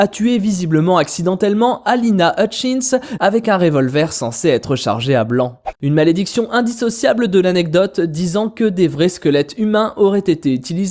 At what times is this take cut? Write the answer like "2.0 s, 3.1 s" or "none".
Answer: 3.2 s, 5.8 s